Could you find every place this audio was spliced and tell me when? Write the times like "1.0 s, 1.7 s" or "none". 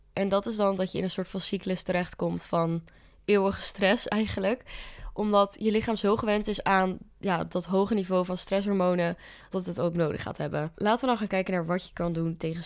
9.5 s, 10.7 s